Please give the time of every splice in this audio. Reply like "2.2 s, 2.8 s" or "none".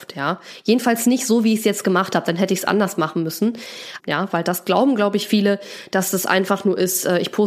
4.0 s